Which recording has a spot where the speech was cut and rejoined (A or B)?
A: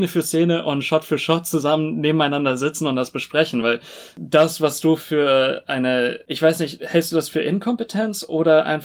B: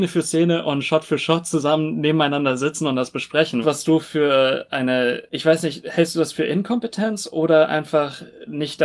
B